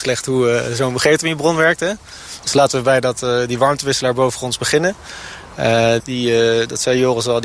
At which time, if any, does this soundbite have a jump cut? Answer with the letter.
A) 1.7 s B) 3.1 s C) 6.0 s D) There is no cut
C